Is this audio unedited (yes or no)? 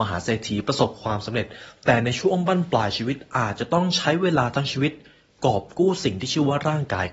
yes